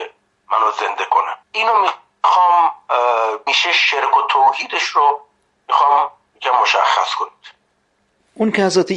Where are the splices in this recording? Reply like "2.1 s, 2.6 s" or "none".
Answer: 1.4 s, 3.5 s